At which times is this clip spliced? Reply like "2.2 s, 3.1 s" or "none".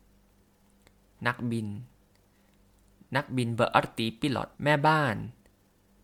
4.5 s

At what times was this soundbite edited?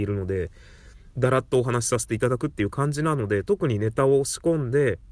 none

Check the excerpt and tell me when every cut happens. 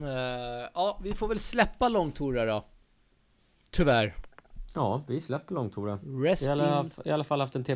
none

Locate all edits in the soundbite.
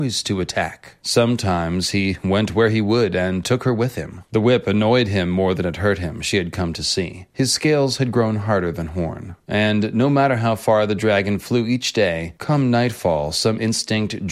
1.0 s, 4.3 s

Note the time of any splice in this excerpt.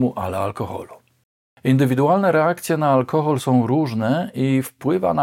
none

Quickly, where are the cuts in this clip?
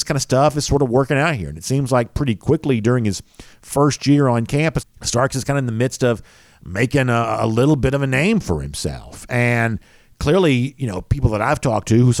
4.8 s

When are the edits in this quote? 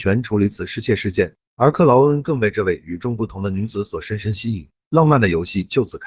none

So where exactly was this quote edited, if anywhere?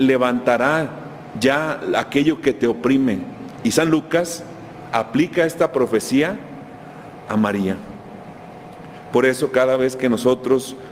3.6 s

